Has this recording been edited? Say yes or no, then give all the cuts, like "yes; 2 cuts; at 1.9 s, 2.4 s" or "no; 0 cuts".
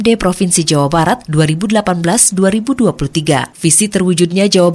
no; 0 cuts